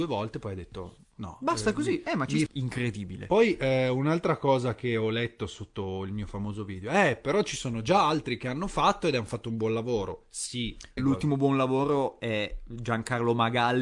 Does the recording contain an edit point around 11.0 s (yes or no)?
yes